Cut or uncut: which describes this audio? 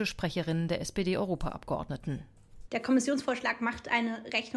uncut